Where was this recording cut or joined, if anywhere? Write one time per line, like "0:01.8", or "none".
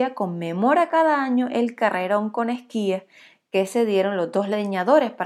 none